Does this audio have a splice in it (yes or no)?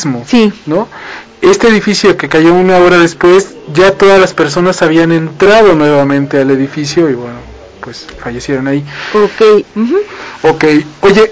yes